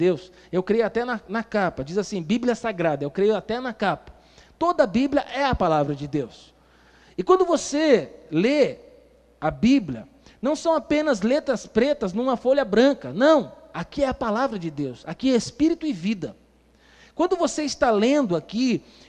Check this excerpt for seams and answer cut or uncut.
uncut